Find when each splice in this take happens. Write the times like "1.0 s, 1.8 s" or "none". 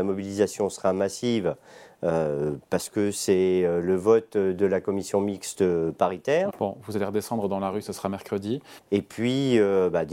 6.5 s, 8.8 s